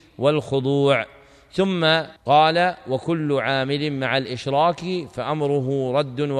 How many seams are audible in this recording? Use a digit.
1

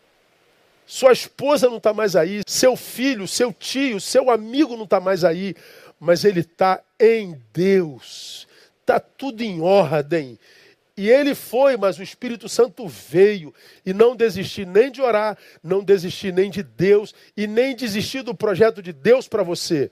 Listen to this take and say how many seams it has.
2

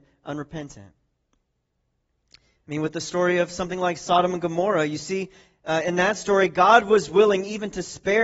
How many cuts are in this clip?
0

